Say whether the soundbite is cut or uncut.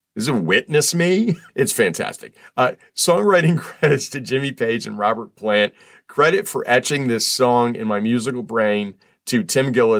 cut